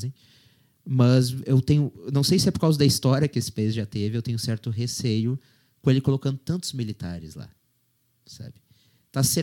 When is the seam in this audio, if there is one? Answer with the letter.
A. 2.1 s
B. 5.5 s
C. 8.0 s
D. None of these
D